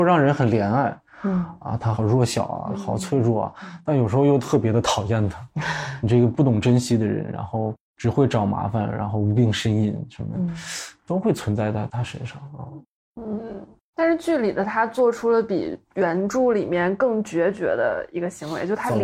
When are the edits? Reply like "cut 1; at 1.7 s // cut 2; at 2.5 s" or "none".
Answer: cut 1; at 1.9 s